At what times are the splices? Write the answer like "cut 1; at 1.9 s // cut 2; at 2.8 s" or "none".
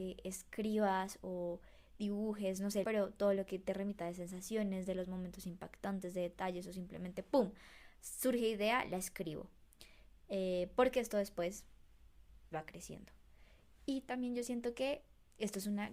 cut 1; at 2.8 s // cut 2; at 12.5 s